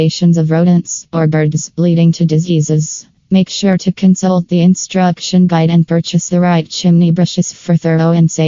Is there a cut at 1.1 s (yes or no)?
yes